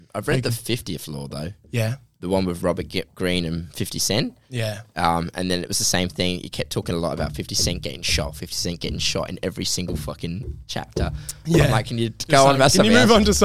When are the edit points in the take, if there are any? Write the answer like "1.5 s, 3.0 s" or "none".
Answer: 2.6 s